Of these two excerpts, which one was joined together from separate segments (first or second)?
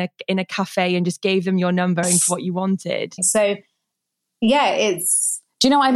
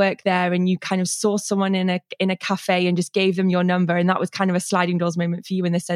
first